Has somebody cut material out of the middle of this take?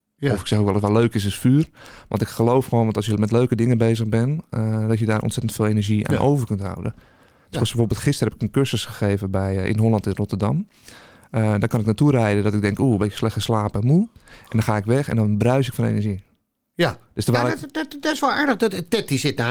no; 0 cuts

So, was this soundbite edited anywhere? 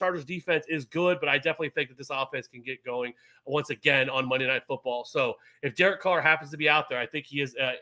no; 0 cuts

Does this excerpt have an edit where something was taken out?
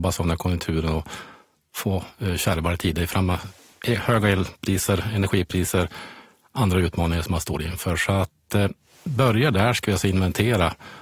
no; 0 cuts

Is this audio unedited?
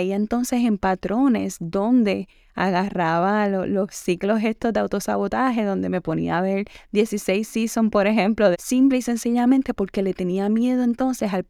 no; 1 cut; at 8.5 s

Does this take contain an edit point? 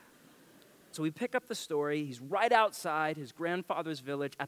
yes; 1 cut; at 0.9 s

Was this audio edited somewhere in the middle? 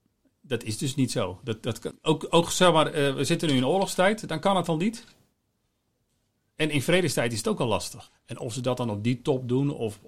yes; 2 cuts; at 1.9 s, 8.1 s

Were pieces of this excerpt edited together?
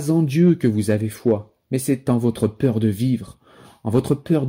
no; 0 cuts

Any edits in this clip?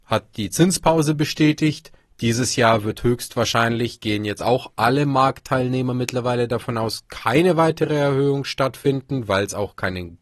no; 0 cuts

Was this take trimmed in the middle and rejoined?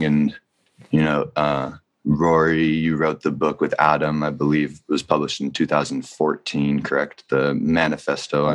no; 0 cuts

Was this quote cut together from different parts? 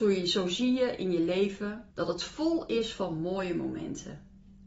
yes; 1 cut; at 1.9 s

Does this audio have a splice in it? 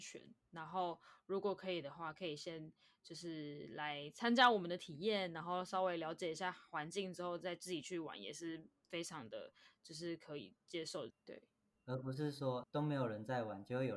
yes; 2 cuts; at 11.1 s, 12.6 s

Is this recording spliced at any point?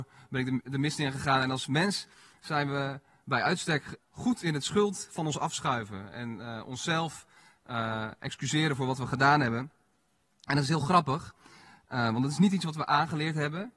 yes; 1 cut; at 4.0 s

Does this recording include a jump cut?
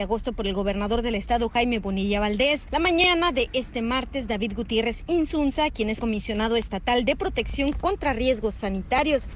no; 0 cuts

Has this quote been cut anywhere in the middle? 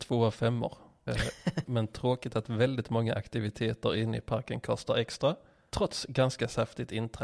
yes; 1 cut; at 1.6 s

